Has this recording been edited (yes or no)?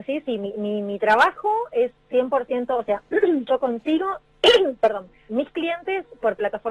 yes